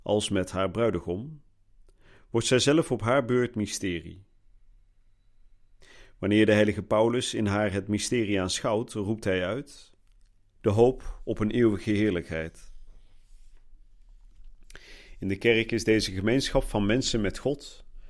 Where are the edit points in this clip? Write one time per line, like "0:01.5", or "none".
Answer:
0:10.5